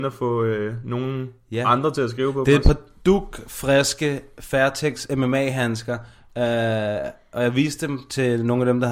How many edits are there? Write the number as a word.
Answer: zero